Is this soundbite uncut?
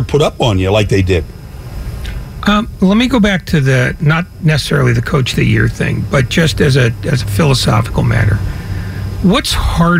yes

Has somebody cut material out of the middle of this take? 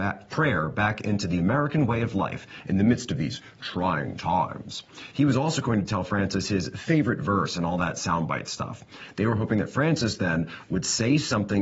no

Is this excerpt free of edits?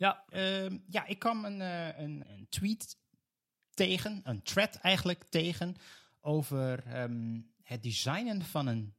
no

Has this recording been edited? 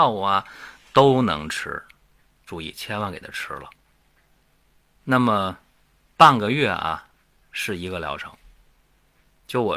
no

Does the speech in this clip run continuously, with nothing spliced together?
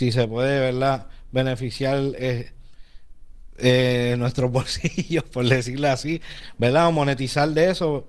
yes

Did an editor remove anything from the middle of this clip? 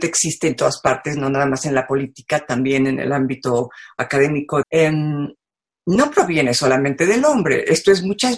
yes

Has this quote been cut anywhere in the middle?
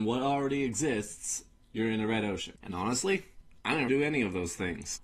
yes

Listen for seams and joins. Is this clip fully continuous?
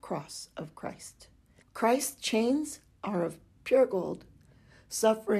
no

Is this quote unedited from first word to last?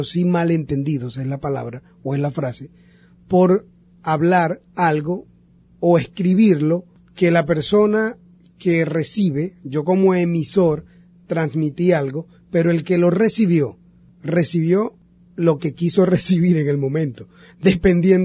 yes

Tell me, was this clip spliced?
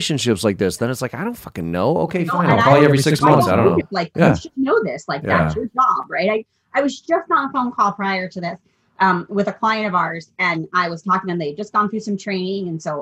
yes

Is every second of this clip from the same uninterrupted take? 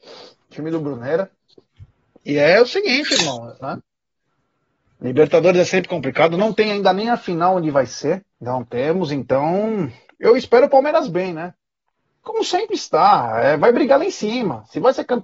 no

